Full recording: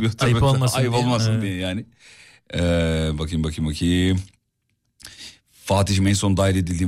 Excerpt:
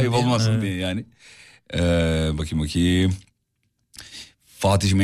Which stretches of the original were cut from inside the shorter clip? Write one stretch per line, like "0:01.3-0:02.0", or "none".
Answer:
0:03.2-0:03.4